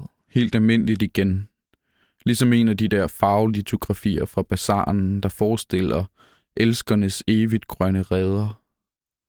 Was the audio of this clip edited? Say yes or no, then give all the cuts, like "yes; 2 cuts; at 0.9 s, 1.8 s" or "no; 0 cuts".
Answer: no; 0 cuts